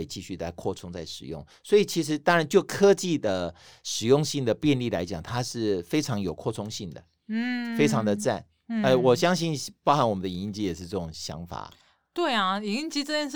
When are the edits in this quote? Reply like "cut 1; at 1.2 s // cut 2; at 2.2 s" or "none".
none